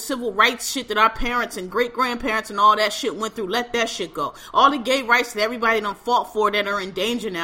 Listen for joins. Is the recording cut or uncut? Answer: uncut